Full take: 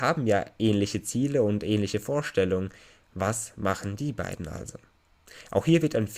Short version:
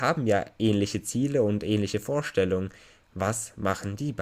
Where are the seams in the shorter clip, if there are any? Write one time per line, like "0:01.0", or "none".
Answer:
none